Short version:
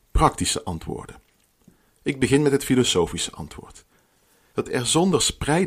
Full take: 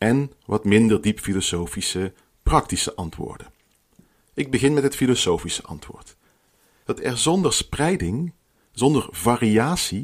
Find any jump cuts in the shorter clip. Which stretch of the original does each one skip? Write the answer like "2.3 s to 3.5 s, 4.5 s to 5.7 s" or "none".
none